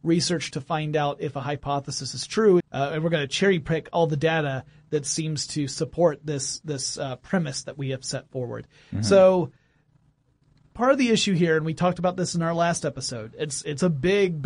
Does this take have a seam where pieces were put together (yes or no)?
yes